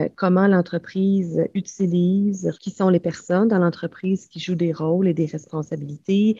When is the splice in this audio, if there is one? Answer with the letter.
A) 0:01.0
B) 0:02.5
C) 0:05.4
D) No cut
B